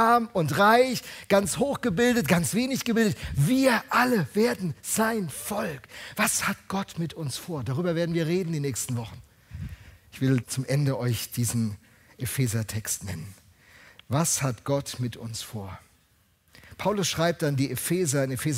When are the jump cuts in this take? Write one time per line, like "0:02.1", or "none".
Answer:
0:10.4

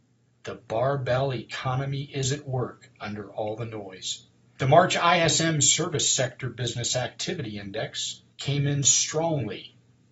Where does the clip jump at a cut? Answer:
0:04.6
0:08.3

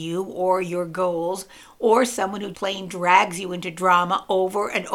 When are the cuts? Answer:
0:02.5

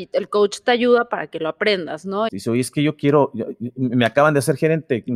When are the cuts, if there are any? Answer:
0:02.3

